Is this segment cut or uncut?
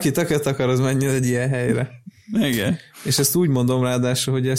uncut